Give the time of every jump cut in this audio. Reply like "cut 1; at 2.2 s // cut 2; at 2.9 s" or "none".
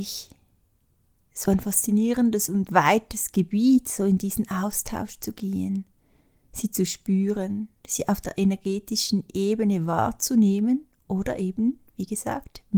none

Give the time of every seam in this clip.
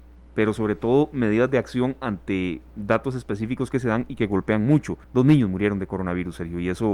cut 1; at 5.0 s

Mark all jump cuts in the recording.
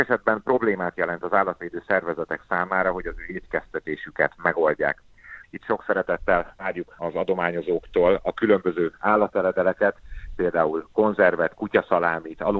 cut 1; at 5.4 s

